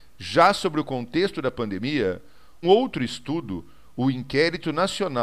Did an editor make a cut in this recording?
yes; 1 cut; at 2.6 s

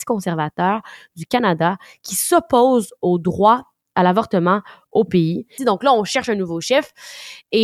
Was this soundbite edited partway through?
yes; 1 cut; at 5.6 s

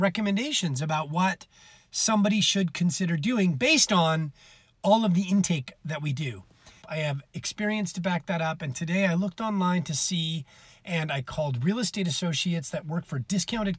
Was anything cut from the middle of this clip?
yes; 1 cut; at 6.8 s

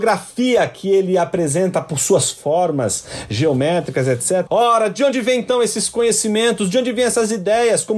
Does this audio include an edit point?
yes; 1 cut; at 4.5 s

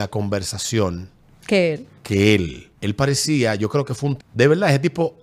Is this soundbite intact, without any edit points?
no; 2 cuts; at 2.8 s, 4.2 s

